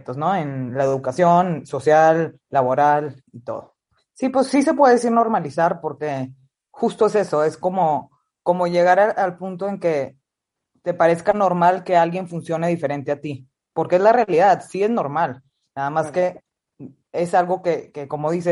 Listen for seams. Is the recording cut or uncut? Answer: cut